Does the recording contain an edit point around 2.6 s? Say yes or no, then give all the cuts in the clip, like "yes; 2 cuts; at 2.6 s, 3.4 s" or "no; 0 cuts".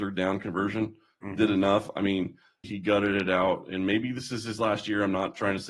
yes; 1 cut; at 2.6 s